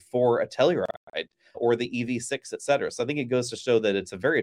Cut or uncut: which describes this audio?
cut